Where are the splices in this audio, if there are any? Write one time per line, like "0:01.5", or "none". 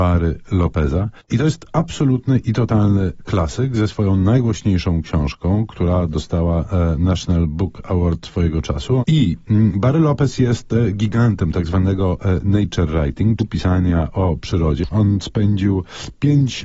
0:09.0
0:13.4
0:14.9